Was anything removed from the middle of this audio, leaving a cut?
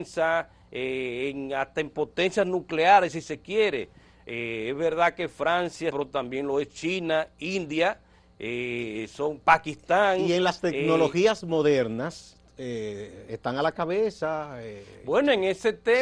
yes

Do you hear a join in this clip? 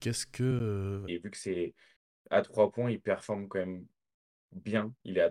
yes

